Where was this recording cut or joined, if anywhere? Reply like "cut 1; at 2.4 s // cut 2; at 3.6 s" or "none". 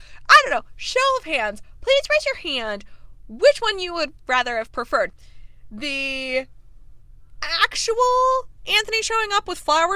none